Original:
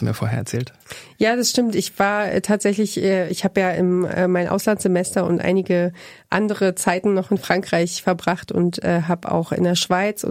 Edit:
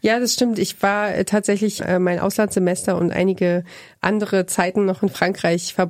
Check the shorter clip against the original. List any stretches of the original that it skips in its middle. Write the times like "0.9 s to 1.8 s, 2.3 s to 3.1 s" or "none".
2.9 s to 4.1 s